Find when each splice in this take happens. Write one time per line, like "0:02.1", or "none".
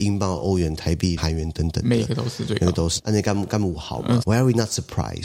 0:01.2
0:03.0
0:04.2